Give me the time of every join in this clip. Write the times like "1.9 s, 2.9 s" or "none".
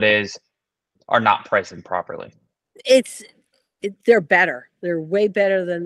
none